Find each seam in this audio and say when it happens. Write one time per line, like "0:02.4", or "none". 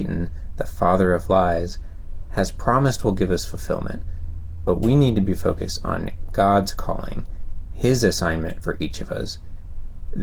none